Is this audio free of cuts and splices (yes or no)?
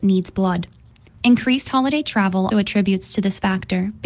no